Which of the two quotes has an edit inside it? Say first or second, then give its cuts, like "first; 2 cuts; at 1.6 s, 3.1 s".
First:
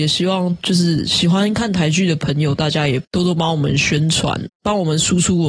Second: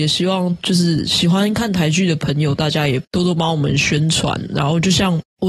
first; 1 cut; at 4.5 s